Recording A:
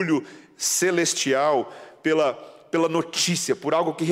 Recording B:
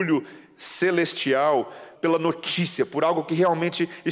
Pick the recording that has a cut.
B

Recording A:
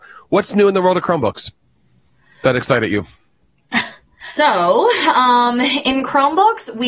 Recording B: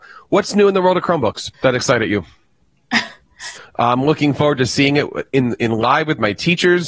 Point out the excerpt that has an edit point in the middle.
B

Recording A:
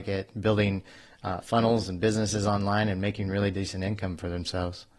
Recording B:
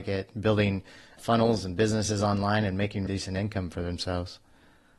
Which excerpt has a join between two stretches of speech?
B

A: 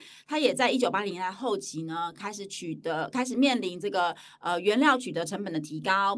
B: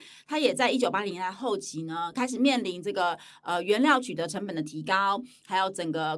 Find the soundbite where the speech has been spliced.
B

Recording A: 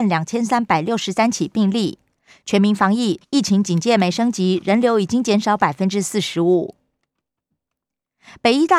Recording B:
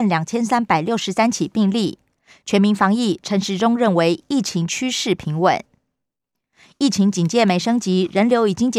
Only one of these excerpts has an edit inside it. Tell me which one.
A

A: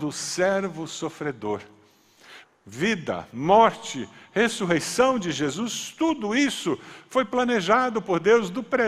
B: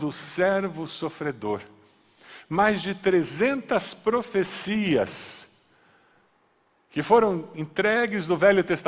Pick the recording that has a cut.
A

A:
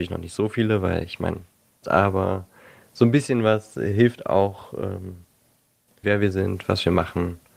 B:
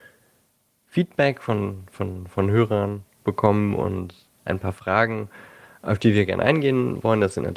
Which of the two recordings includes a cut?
A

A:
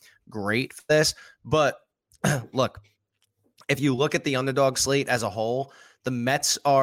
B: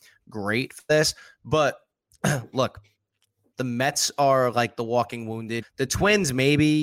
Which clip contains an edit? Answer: B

